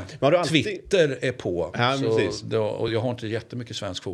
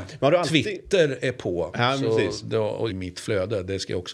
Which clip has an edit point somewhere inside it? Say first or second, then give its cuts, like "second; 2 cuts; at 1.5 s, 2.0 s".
second; 1 cut; at 2.9 s